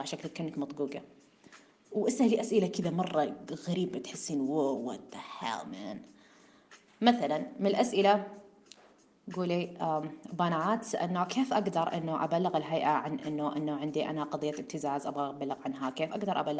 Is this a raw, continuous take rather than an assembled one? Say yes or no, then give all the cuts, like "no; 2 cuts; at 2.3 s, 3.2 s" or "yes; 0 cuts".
yes; 0 cuts